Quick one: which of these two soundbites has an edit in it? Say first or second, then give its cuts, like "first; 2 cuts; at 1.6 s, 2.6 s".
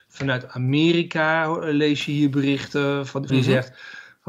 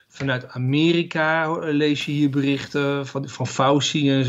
first; 1 cut; at 3.3 s